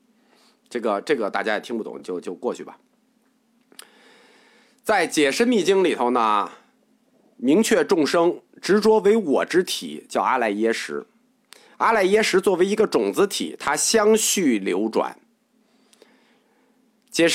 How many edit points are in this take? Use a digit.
0